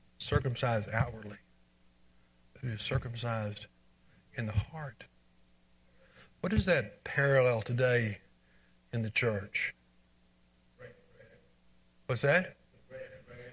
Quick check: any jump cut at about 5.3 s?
no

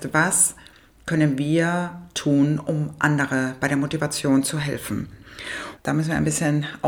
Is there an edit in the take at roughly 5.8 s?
yes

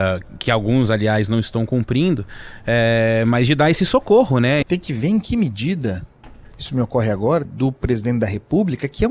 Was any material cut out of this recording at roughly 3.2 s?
no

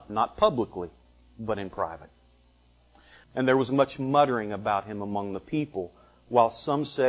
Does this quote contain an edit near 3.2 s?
yes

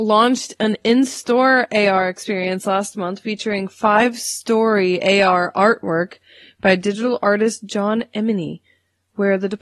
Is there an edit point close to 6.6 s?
no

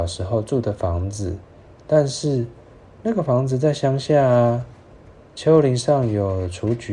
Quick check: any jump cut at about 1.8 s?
no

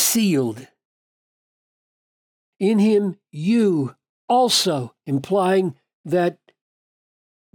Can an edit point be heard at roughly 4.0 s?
no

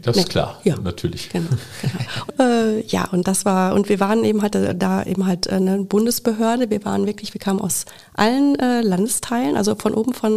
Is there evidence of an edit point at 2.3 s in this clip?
yes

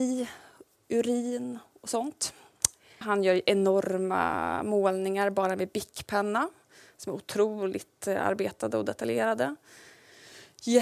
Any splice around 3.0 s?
yes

